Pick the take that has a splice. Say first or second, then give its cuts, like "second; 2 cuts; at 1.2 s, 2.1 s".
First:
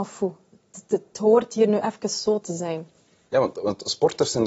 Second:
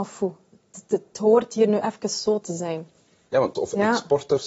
second; 1 cut; at 3.6 s